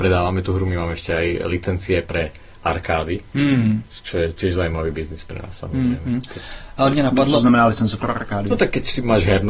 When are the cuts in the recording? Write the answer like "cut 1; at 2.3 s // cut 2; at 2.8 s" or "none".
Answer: none